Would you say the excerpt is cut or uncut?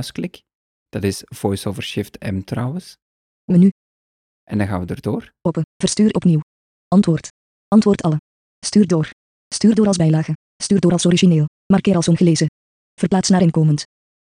cut